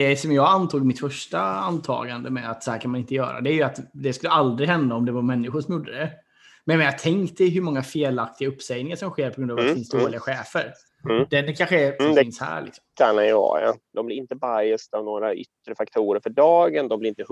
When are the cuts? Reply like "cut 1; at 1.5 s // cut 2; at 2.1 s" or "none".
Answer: cut 1; at 12.0 s // cut 2; at 13.9 s